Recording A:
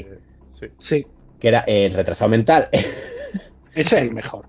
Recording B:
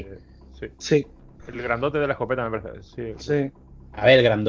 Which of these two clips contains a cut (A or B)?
B